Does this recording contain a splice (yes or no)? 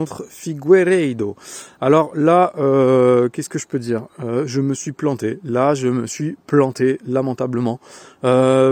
no